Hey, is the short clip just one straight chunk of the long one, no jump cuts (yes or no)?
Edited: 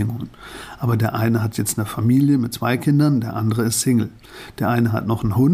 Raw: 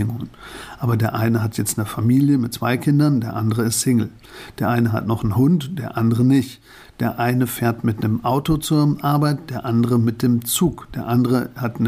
yes